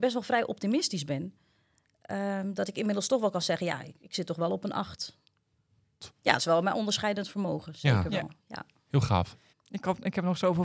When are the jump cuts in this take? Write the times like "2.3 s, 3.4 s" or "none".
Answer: 6.0 s, 9.5 s